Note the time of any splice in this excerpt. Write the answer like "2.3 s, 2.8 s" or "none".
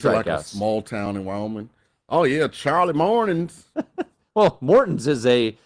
none